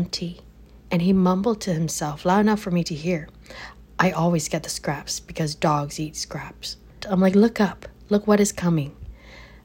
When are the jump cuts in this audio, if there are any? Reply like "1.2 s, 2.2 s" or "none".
7.0 s